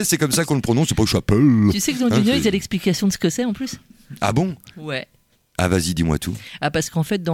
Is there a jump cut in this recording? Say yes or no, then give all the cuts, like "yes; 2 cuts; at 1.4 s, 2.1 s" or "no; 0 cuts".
no; 0 cuts